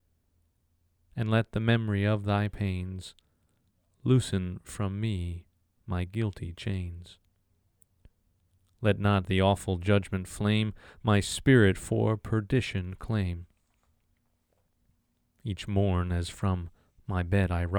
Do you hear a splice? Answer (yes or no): no